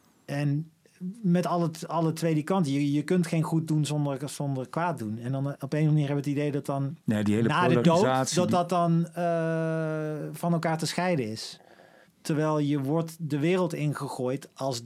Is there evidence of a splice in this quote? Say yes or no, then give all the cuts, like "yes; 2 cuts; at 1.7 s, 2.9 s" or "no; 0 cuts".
yes; 2 cuts; at 7.0 s, 12.0 s